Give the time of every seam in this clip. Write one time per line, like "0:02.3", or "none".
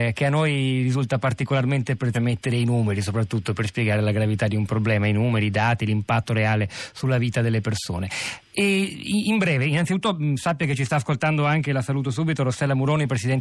0:02.1